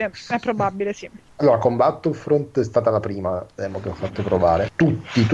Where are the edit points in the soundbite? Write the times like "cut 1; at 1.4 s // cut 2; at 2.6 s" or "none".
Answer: none